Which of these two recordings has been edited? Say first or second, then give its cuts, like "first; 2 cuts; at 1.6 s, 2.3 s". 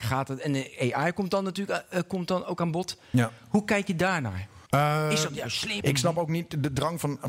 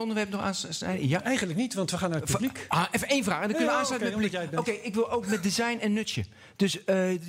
first; 2 cuts; at 4.7 s, 5.8 s